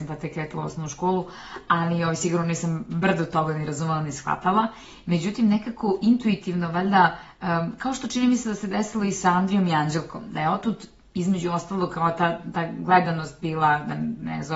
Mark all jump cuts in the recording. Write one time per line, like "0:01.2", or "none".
none